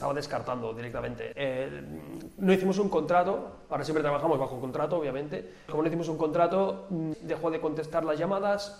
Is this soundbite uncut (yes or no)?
no